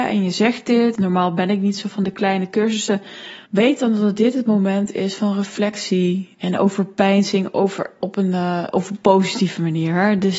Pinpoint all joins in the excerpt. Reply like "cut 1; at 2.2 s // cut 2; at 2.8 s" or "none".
cut 1; at 1.0 s // cut 2; at 3.5 s // cut 3; at 8.0 s